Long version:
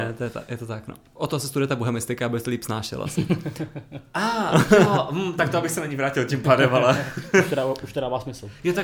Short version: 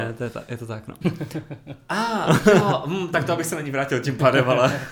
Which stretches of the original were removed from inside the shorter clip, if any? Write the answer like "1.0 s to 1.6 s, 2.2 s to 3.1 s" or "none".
1.0 s to 3.3 s